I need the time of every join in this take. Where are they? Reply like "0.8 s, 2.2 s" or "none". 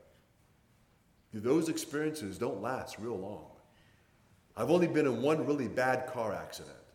none